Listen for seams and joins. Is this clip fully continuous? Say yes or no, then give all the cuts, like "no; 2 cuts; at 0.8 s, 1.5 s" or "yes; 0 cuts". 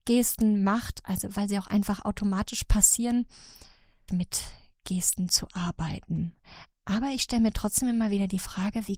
no; 1 cut; at 4.1 s